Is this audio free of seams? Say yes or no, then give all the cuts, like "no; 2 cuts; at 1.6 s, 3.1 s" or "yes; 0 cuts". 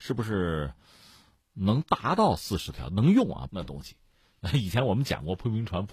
no; 1 cut; at 3.5 s